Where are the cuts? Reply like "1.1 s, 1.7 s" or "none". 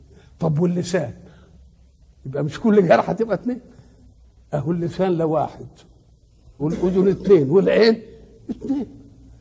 6.6 s